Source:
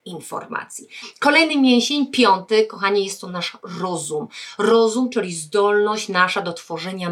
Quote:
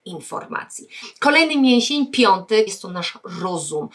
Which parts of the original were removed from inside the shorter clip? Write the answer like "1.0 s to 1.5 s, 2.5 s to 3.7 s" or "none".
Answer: 2.7 s to 3.1 s